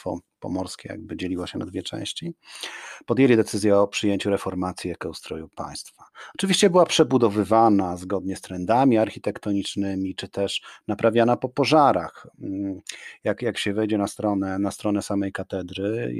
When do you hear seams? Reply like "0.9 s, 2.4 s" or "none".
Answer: none